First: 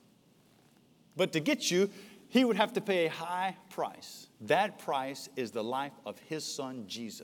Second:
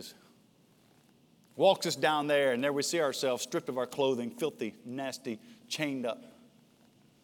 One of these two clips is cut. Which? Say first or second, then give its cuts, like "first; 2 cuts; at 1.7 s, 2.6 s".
first; 2 cuts; at 1.1 s, 4.3 s